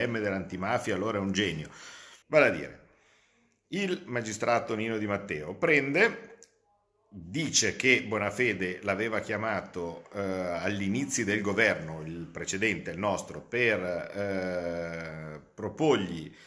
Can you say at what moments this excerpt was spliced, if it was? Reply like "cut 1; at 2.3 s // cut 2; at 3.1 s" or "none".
cut 1; at 2.2 s